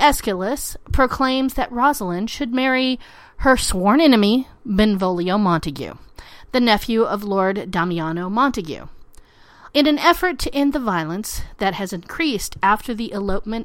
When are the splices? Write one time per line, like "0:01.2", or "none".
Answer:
0:09.7